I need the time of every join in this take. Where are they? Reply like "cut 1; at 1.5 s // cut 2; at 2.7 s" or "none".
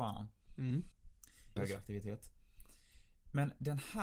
cut 1; at 1.6 s